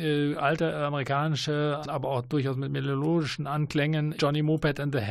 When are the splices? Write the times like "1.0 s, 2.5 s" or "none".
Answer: 1.8 s, 4.2 s